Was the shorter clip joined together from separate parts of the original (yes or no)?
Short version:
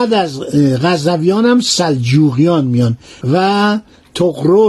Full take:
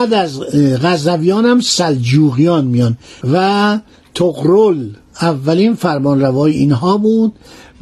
no